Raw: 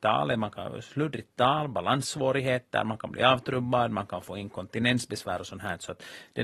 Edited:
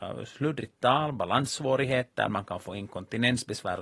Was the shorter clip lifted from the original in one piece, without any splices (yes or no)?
no